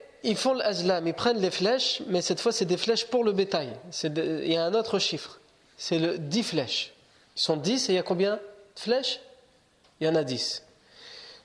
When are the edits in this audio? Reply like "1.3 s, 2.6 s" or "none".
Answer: none